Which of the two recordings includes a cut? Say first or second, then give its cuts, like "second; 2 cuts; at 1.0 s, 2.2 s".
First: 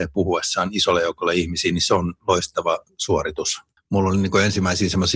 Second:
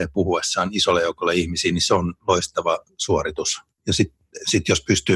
first; 1 cut; at 3.8 s